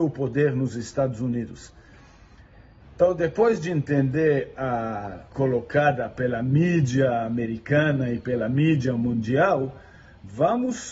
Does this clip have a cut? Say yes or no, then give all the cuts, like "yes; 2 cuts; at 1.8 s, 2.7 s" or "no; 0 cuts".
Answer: yes; 2 cuts; at 2.8 s, 5.3 s